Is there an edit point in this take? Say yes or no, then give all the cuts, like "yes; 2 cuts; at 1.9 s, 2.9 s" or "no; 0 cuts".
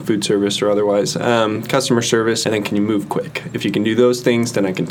yes; 1 cut; at 2.4 s